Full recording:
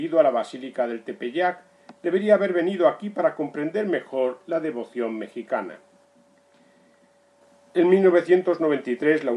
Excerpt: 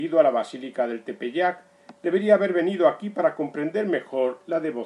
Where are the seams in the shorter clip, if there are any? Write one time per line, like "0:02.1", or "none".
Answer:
none

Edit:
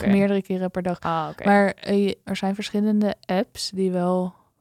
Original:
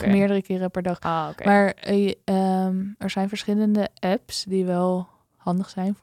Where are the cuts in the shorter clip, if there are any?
0:02.2

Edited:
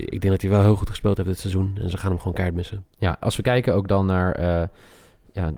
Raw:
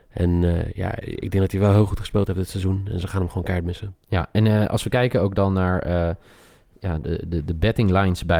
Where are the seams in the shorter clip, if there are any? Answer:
0:03.2

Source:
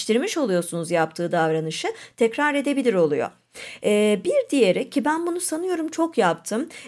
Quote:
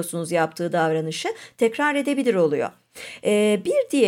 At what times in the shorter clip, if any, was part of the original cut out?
none

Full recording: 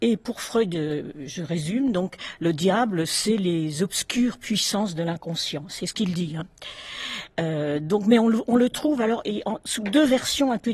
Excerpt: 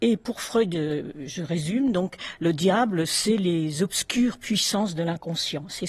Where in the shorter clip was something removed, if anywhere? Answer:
none

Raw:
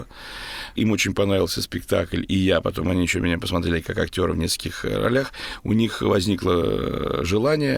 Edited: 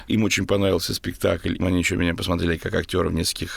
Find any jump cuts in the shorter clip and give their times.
0:01.6

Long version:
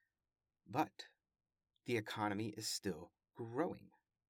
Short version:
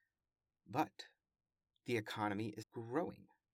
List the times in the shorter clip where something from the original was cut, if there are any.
0:02.6

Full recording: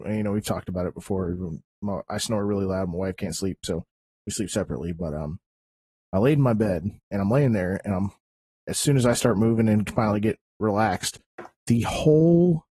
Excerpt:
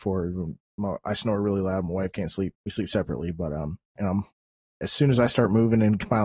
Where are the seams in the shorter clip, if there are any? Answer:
0:02.5
0:04.0

